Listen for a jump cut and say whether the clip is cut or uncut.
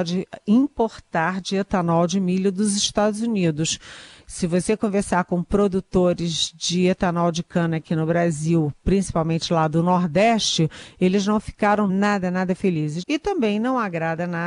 cut